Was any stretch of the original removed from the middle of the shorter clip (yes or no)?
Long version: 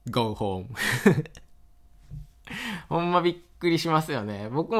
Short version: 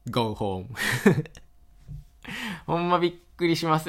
yes